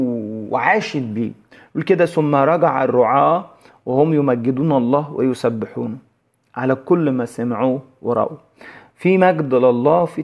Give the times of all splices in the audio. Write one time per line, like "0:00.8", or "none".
none